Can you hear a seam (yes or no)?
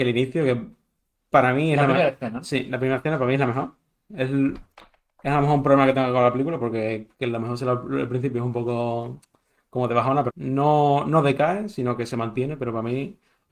yes